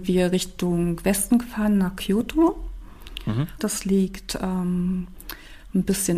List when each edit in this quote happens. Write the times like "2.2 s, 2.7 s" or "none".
3.6 s